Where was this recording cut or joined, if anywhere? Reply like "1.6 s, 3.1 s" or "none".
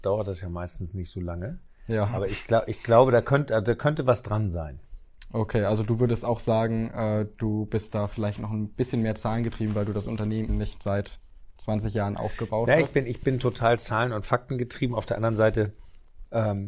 10.5 s